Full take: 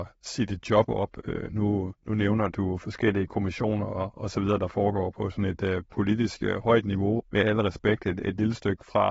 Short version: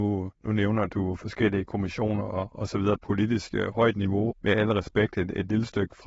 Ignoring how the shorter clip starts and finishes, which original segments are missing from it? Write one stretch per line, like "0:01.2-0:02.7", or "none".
0:04.6-0:05.8